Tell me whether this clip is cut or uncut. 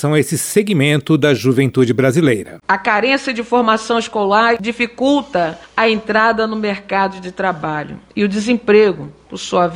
cut